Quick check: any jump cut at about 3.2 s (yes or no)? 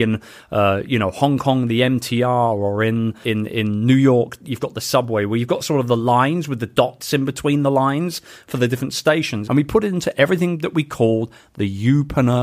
yes